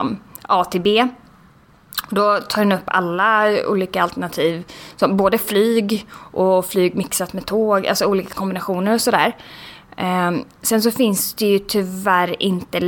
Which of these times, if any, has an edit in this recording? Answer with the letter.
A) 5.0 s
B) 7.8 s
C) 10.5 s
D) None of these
D